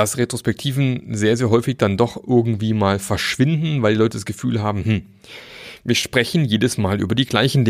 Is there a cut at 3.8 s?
no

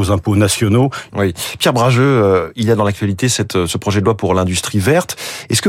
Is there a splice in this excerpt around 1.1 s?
yes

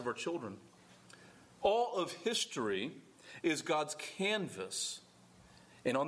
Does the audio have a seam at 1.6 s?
yes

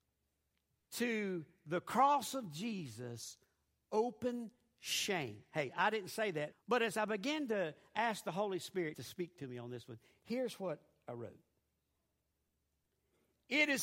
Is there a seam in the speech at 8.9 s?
yes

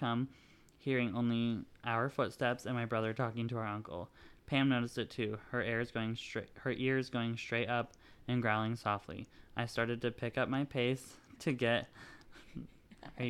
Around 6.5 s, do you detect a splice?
no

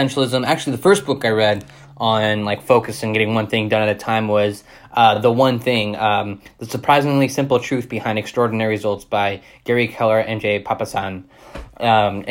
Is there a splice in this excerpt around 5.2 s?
no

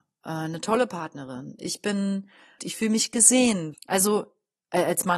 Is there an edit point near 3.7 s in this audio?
yes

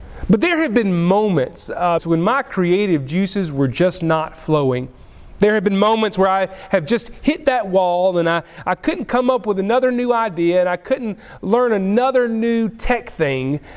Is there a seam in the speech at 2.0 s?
yes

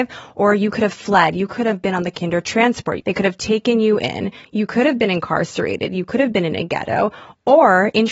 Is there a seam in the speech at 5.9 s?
no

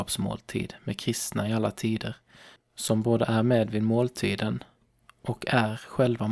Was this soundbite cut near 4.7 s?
no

